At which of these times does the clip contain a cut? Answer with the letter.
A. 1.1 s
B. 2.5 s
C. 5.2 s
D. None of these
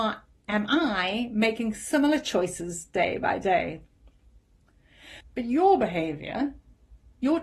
C